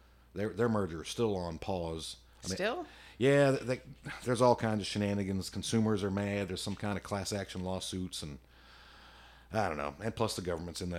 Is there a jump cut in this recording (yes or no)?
no